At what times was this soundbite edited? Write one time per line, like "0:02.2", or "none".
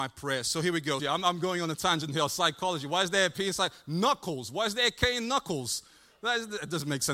0:01.0